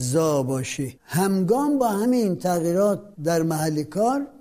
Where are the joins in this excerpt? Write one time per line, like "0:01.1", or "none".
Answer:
0:01.0
0:03.1

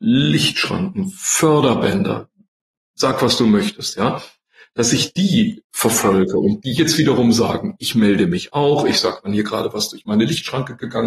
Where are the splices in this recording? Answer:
none

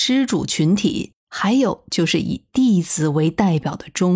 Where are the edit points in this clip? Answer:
0:01.2

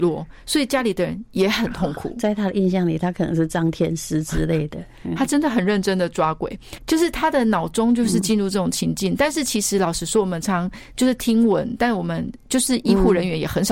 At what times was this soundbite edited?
0:06.8
0:10.4

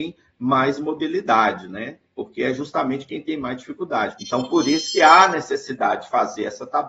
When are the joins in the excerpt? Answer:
0:04.2

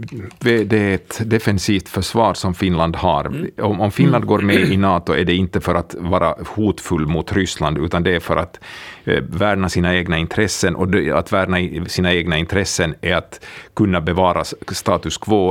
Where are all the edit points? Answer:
none

